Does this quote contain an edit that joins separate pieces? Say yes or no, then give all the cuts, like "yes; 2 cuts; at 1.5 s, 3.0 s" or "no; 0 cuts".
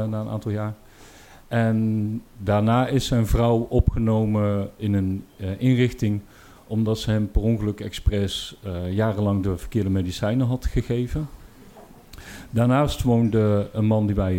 no; 0 cuts